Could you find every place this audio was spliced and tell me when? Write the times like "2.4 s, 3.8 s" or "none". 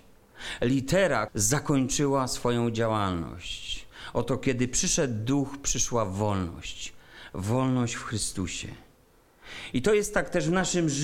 1.3 s